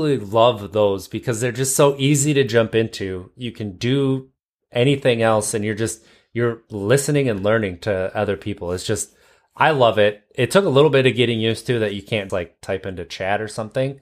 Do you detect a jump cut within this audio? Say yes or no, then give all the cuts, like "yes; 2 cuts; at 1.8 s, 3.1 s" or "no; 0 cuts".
yes; 1 cut; at 12.3 s